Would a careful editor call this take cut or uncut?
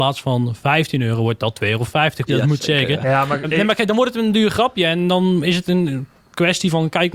cut